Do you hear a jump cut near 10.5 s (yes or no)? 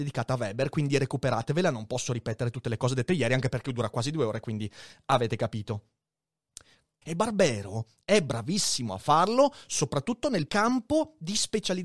yes